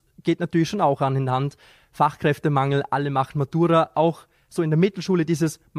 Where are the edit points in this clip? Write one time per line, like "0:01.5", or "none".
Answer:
none